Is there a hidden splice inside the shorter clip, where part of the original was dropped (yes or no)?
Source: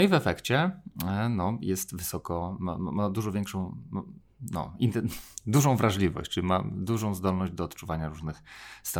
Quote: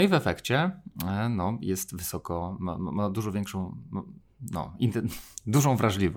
no